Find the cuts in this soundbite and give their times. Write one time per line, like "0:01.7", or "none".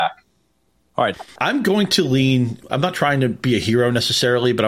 0:01.1
0:02.7